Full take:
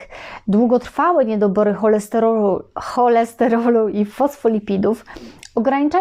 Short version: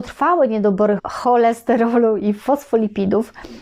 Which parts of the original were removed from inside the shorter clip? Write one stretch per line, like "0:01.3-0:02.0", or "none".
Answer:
0:01.8-0:02.7